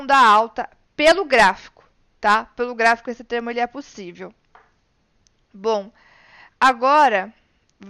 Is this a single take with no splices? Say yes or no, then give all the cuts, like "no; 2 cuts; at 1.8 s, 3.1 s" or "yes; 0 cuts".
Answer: yes; 0 cuts